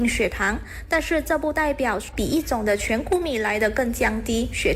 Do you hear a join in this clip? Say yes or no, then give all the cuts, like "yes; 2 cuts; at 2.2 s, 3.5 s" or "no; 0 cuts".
no; 0 cuts